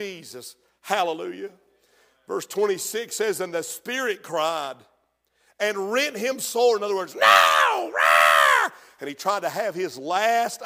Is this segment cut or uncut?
uncut